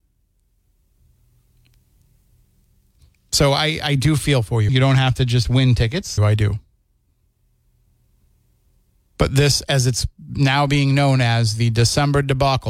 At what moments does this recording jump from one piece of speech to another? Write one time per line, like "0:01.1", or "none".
0:04.7
0:06.2